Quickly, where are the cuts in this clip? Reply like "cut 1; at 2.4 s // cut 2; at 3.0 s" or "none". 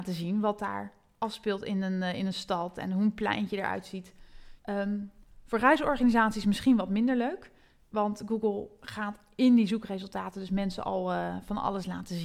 cut 1; at 4.6 s